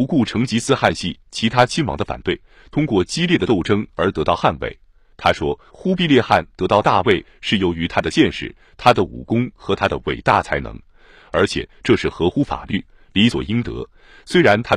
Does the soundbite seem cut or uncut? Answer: uncut